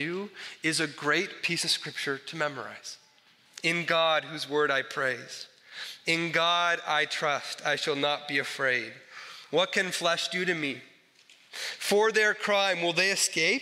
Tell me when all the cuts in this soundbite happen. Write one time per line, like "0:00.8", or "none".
0:03.5